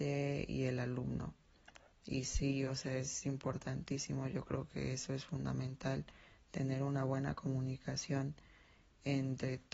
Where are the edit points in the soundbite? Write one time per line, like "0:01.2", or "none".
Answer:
none